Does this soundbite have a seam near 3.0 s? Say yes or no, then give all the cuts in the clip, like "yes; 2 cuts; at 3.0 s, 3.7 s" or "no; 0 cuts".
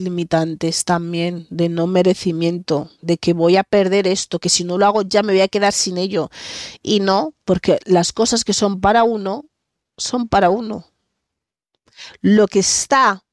yes; 1 cut; at 3.0 s